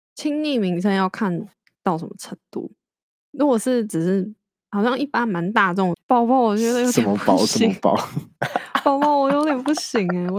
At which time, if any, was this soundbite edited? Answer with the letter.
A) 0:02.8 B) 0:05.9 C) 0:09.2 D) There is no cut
B